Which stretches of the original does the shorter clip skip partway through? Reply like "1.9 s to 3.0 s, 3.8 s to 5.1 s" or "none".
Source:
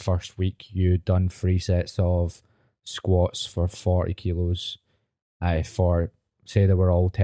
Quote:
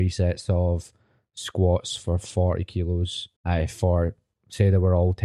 4.8 s to 5.3 s